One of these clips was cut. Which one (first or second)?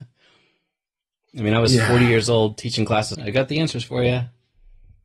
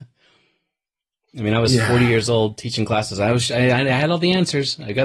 first